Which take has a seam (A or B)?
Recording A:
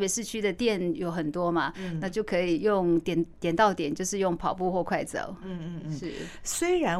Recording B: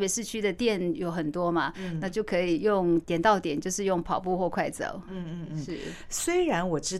B